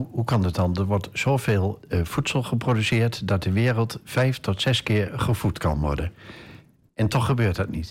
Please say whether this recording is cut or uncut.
cut